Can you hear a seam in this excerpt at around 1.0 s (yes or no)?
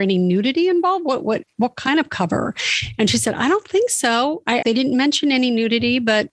no